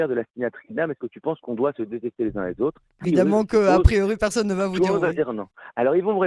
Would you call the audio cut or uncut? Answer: cut